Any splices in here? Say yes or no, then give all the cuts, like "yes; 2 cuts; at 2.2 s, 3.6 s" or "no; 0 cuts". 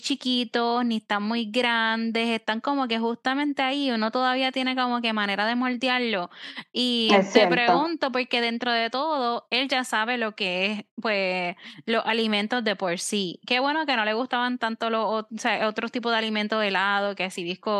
no; 0 cuts